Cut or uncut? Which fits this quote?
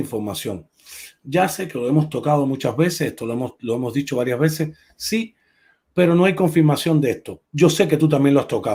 cut